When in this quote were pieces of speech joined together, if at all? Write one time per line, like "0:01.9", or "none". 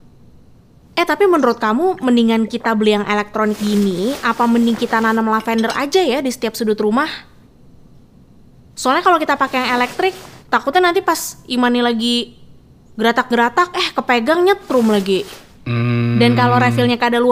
none